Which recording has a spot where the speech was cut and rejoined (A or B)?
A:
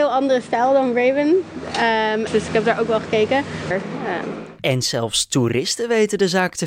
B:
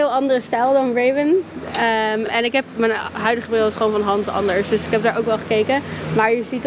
A